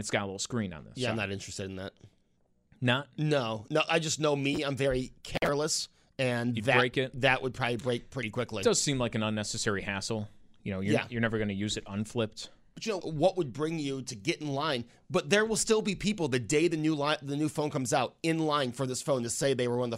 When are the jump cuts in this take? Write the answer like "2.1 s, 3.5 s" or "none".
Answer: 13.0 s